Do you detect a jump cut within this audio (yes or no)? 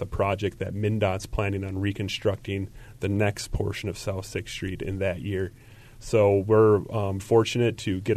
yes